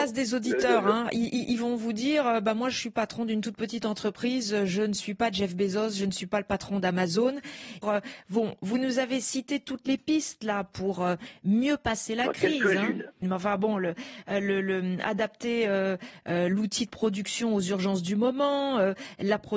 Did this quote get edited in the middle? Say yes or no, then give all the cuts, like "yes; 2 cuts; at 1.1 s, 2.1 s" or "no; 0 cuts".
yes; 2 cuts; at 7.8 s, 13.2 s